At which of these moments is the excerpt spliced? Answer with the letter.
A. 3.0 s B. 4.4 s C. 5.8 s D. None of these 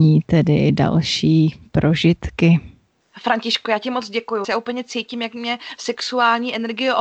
B